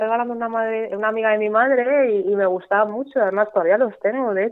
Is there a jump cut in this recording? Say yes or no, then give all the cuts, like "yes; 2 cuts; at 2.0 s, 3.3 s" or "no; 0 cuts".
no; 0 cuts